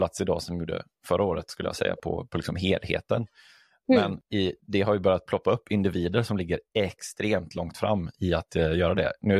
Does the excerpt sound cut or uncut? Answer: uncut